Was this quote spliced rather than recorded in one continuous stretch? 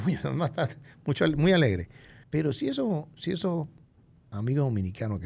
yes; 1 cut; at 2.2 s

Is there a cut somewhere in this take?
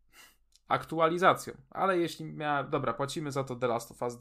no; 0 cuts

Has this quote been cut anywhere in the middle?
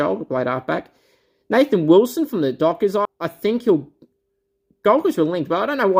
yes; 1 cut; at 3.1 s

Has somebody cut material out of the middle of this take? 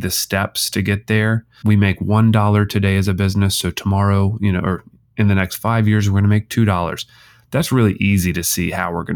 yes; 1 cut; at 1.6 s

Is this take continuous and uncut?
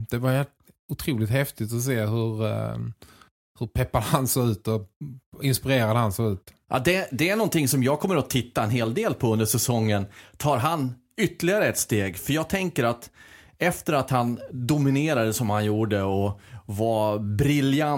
yes; 0 cuts

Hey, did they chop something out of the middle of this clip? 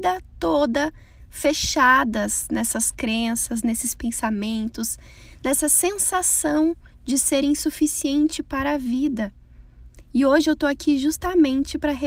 no; 0 cuts

